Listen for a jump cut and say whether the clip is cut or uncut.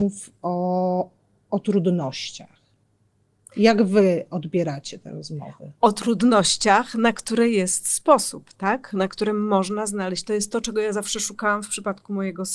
uncut